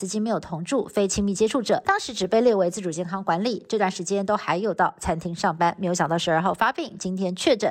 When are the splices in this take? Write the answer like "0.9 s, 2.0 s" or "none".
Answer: 1.8 s